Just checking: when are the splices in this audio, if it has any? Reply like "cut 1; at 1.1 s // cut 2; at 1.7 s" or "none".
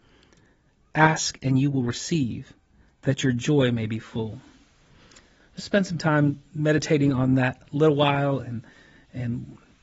cut 1; at 0.9 s